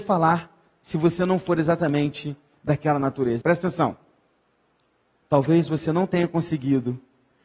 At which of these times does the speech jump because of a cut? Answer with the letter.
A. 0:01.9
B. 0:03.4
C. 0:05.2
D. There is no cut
B